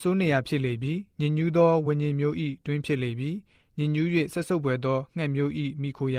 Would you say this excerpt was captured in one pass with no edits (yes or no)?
yes